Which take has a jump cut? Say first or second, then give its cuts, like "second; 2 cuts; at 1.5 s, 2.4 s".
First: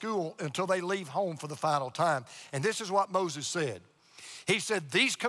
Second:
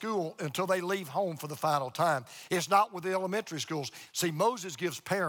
second; 2 cuts; at 2.5 s, 4.1 s